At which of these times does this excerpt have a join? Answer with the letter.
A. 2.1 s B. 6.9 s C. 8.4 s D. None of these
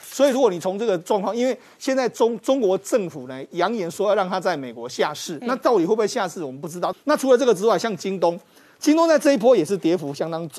B